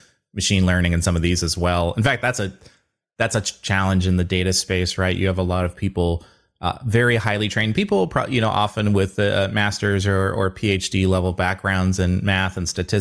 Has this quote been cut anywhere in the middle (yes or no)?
no